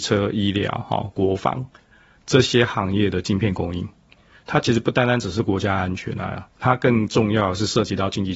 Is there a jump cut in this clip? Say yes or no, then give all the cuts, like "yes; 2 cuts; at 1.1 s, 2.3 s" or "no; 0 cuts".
no; 0 cuts